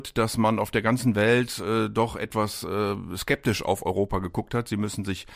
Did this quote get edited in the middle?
no; 0 cuts

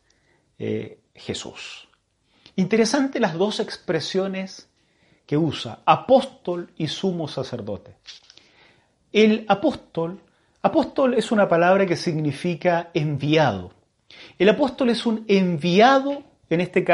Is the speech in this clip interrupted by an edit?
no; 0 cuts

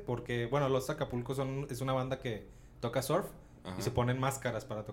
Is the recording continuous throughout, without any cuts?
yes; 0 cuts

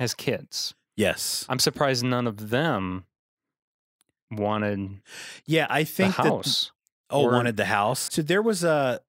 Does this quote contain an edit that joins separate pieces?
yes; 1 cut; at 8.1 s

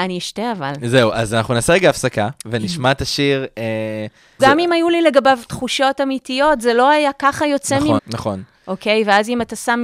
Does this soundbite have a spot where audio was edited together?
yes; 2 cuts; at 4.4 s, 8.0 s

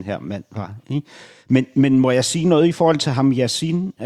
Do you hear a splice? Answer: no; 0 cuts

